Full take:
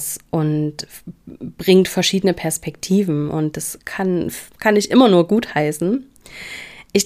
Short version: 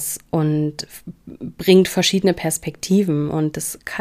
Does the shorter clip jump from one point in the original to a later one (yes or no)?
no